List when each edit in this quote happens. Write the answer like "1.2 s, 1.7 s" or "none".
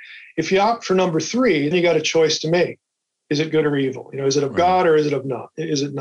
1.7 s